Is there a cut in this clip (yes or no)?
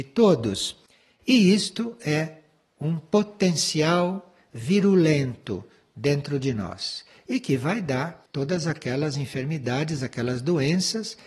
no